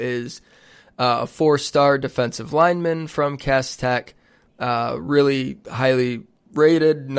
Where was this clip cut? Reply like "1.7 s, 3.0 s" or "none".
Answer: none